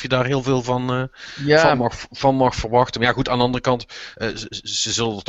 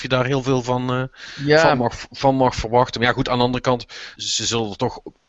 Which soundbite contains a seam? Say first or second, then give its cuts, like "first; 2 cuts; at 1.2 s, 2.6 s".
second; 1 cut; at 4.2 s